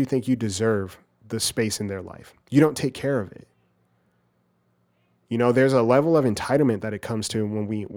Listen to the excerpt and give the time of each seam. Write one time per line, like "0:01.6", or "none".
none